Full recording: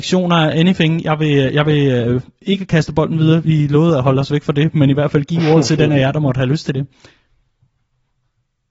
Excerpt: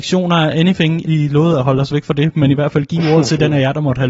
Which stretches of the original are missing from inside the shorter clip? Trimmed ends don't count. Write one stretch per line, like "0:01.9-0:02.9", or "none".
0:01.0-0:03.4